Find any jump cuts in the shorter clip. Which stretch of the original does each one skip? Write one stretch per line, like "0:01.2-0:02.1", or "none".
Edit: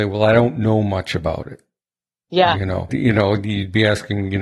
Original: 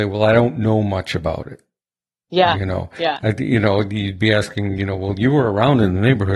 0:02.9-0:03.4